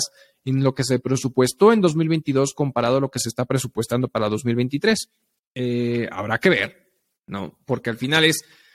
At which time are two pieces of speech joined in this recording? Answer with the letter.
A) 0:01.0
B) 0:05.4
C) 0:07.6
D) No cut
B